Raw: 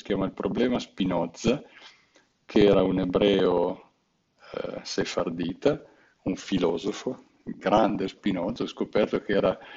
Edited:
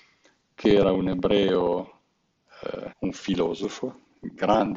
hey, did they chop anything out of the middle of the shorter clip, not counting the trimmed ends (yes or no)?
yes